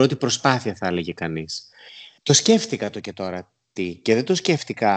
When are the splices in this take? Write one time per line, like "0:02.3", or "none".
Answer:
none